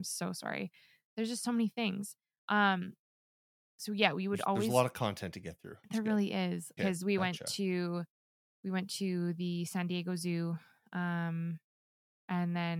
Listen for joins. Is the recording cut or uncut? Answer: cut